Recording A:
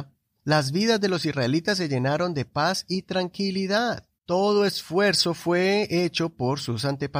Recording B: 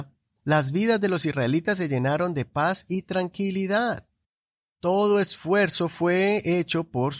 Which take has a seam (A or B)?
A